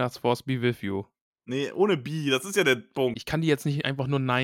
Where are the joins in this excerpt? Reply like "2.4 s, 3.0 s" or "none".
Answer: 3.1 s